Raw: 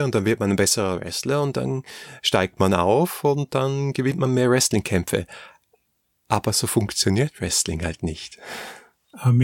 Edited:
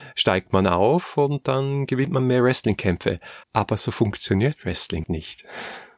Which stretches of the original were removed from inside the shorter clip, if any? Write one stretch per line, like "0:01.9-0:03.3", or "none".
0:05.5-0:06.2
0:07.8-0:08.0